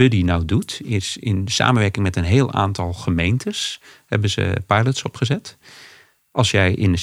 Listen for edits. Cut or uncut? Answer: uncut